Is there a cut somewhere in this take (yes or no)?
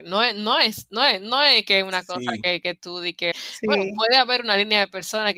yes